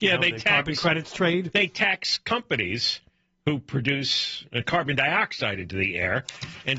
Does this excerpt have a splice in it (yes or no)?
no